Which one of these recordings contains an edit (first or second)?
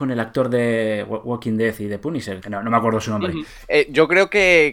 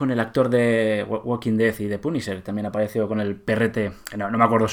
first